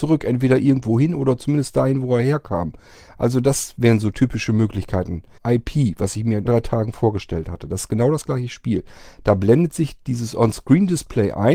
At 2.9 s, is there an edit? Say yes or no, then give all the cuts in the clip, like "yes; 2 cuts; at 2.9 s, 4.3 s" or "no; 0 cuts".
no; 2 cuts; at 5.4 s, 6.5 s